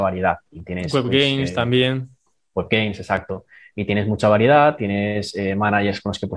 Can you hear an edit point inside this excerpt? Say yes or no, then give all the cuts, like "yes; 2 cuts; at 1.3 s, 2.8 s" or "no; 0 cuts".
no; 0 cuts